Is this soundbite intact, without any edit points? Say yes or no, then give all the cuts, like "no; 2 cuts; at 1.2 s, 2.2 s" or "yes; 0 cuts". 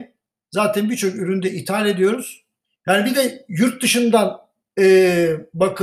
no; 1 cut; at 2.6 s